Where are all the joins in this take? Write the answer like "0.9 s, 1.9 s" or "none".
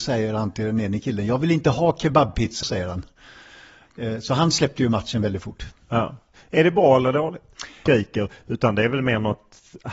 2.6 s, 7.9 s